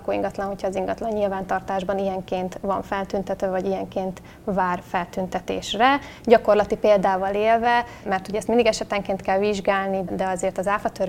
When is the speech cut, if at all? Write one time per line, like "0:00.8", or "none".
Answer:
0:10.1

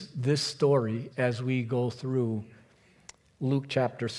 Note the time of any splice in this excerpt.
0:01.1

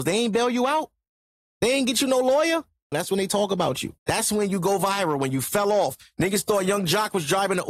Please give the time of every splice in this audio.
0:02.9
0:04.0

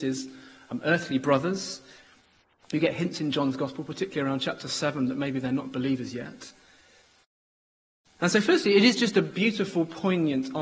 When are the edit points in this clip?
none

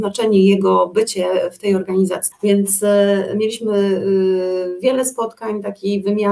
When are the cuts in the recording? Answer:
0:02.3

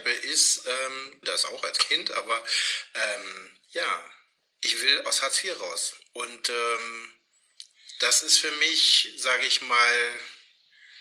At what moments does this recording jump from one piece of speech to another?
0:01.2

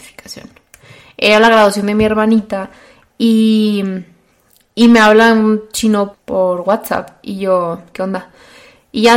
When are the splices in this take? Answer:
0:06.1

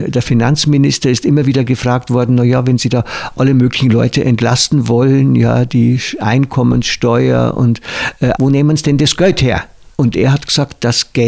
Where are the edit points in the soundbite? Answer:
0:08.3
0:09.9

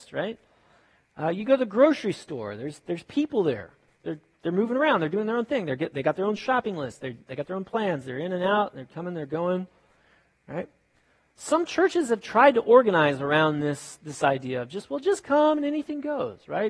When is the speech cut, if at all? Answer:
none

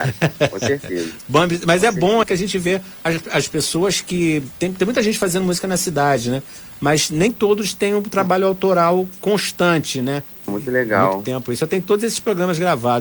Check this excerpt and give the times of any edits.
0:02.2
0:10.5

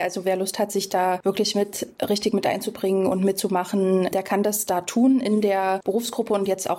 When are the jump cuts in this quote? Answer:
none

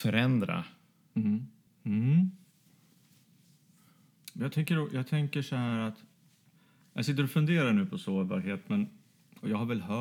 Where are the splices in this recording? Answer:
0:01.7

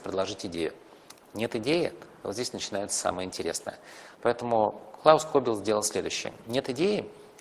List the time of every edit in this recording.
0:04.1

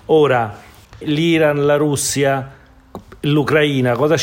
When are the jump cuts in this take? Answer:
0:01.0

